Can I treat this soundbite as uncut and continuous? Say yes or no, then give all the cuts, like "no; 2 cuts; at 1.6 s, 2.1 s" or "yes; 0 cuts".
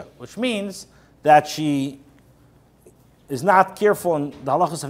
yes; 0 cuts